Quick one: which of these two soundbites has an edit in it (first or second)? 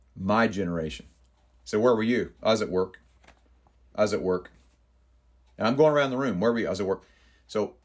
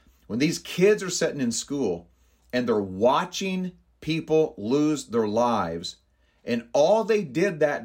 first